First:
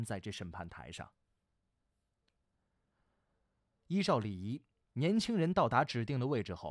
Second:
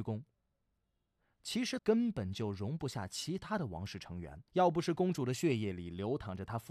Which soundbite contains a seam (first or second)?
second